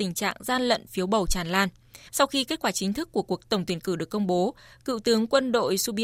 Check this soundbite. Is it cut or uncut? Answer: cut